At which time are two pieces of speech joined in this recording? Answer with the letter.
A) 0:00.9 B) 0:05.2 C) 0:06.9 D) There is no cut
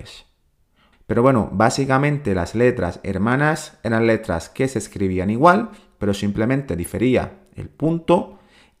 A